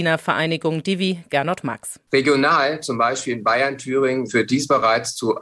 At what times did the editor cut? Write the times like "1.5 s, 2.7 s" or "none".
4.3 s